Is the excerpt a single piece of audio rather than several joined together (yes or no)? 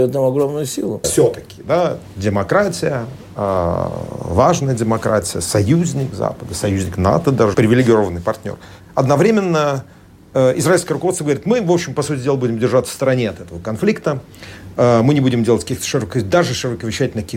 no